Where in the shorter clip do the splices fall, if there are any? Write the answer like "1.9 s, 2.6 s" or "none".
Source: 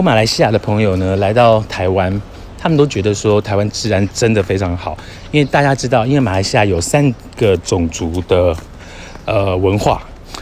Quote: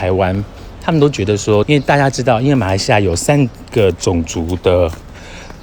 1.6 s